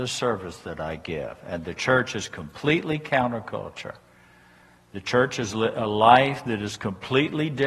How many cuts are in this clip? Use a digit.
0